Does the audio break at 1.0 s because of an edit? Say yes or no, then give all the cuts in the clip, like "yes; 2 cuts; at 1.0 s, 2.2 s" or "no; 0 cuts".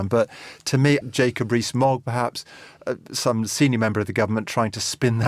yes; 1 cut; at 1.0 s